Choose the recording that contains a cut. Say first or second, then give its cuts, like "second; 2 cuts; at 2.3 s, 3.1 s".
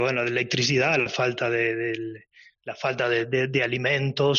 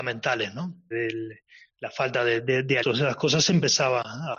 second; 2 cuts; at 0.9 s, 2.8 s